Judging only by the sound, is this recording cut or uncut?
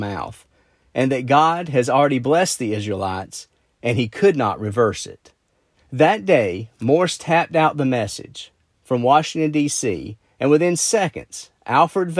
cut